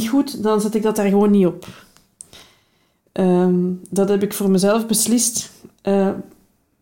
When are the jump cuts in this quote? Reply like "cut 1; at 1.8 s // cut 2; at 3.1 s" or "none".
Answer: none

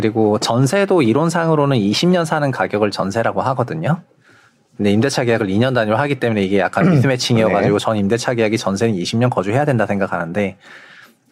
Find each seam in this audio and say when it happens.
none

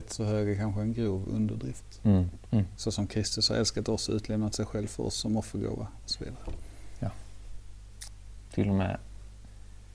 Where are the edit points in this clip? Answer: cut 1; at 2.5 s // cut 2; at 8.5 s

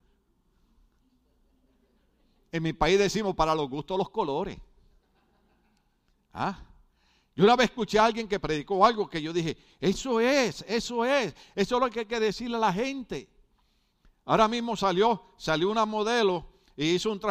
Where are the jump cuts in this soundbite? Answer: none

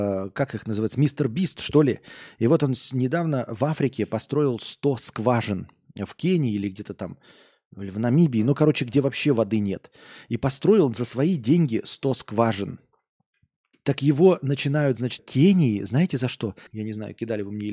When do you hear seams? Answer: cut 1; at 13.7 s // cut 2; at 15.2 s // cut 3; at 16.7 s

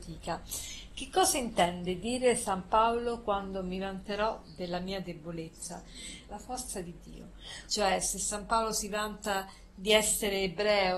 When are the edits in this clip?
cut 1; at 6.3 s // cut 2; at 7.7 s

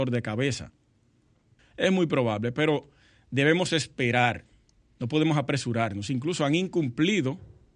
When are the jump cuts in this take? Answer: cut 1; at 1.6 s

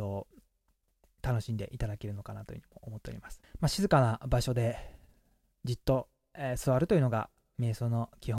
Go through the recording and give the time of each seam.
cut 1; at 3.4 s

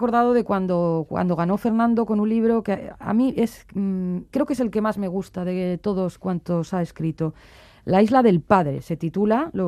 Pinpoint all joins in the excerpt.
cut 1; at 4.3 s

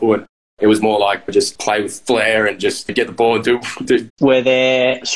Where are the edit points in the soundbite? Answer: cut 1; at 4.1 s

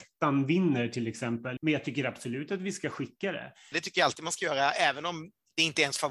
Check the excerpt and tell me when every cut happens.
cut 1; at 1.6 s // cut 2; at 3.7 s

